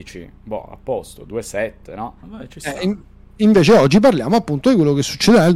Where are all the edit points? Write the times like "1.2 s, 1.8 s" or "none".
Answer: 2.2 s